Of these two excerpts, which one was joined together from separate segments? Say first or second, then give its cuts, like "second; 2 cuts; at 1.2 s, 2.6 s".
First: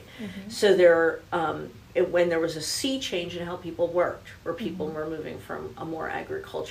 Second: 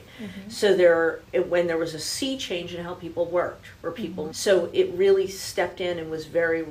second; 2 cuts; at 1.2 s, 4.3 s